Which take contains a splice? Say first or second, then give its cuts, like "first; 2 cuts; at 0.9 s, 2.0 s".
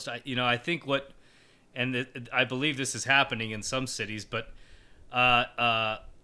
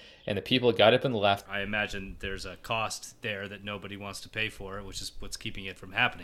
second; 1 cut; at 1.4 s